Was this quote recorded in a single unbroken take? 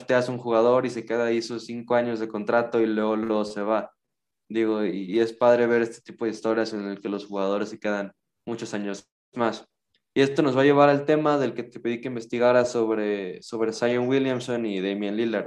yes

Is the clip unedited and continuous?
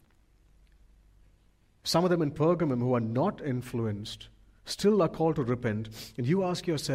yes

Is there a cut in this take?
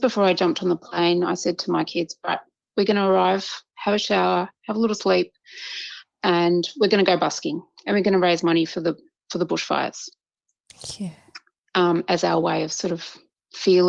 no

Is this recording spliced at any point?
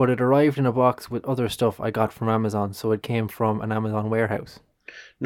no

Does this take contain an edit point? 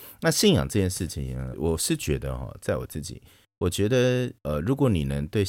yes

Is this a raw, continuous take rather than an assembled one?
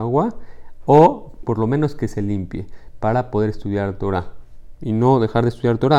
yes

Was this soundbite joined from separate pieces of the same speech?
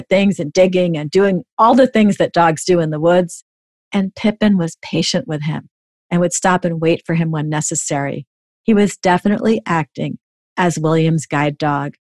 no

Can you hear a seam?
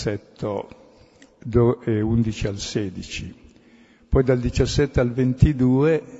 no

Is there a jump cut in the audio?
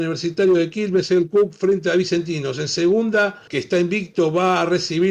yes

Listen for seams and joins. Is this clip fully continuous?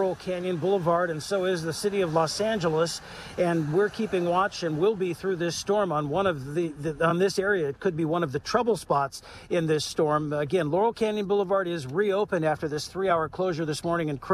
yes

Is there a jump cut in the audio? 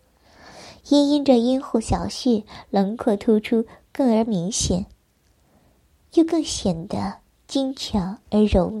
no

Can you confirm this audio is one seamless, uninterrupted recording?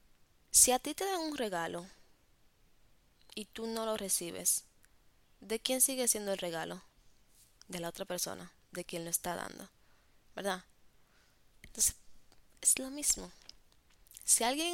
yes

